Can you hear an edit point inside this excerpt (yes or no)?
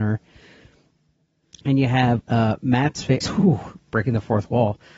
yes